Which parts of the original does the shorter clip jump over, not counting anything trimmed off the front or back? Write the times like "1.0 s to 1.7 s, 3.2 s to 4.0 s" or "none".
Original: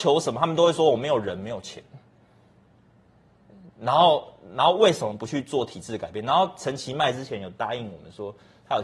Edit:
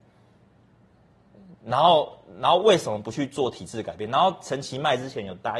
none